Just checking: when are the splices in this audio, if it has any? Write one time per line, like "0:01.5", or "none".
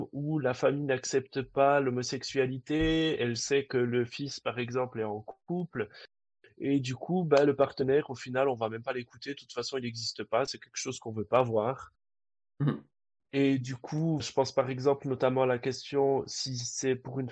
0:14.2